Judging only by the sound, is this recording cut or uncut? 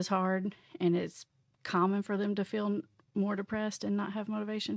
uncut